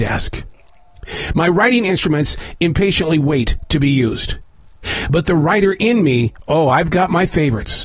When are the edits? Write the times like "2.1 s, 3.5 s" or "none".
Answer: none